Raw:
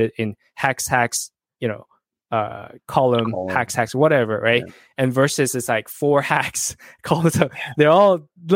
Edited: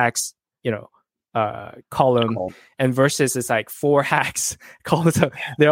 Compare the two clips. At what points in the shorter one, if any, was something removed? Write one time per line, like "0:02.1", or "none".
0:02.5